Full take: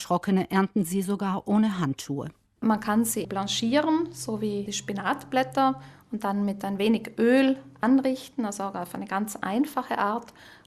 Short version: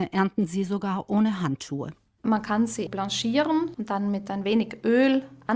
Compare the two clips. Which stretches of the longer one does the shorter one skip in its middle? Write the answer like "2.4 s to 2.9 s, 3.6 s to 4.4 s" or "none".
4.1 s to 6.1 s